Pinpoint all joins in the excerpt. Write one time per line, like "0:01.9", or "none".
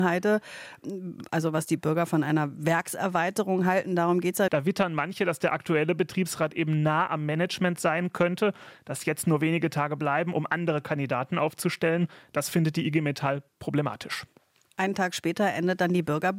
0:04.5

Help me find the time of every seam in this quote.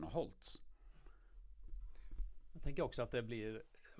none

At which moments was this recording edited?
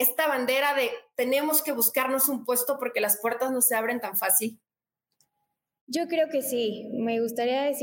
none

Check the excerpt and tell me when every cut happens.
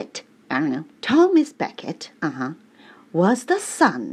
0:00.9

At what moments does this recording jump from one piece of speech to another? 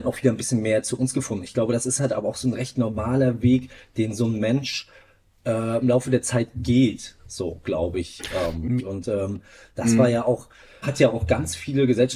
0:08.8
0:10.8

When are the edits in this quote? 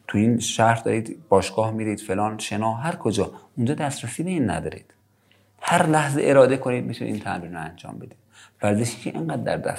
none

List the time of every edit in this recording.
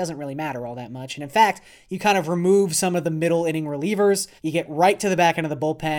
0:04.4

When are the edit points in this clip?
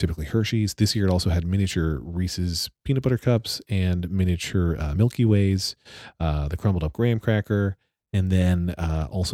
none

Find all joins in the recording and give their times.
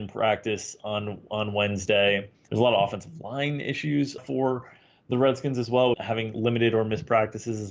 0:02.5
0:04.2
0:05.9

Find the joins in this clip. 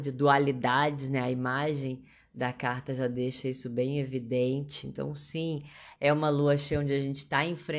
0:06.0

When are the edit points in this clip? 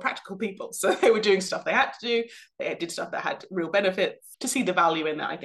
0:04.3

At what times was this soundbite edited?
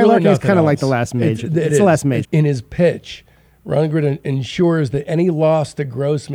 0:02.2

